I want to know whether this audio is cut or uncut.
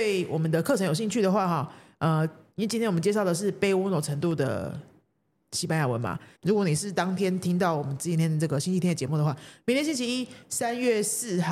cut